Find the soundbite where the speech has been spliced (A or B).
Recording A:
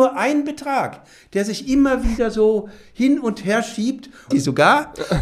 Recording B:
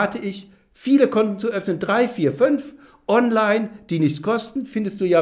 A